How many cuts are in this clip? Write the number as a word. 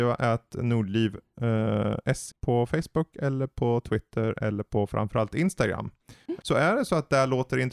two